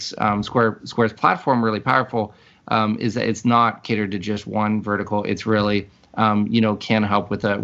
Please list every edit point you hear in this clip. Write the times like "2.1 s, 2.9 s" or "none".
none